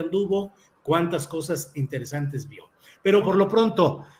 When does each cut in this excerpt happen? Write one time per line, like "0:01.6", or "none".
0:03.2